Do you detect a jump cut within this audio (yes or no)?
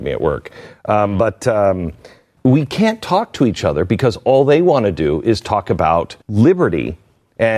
yes